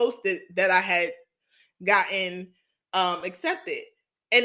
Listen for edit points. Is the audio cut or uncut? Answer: uncut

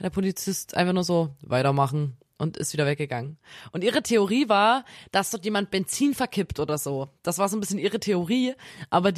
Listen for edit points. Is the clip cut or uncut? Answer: cut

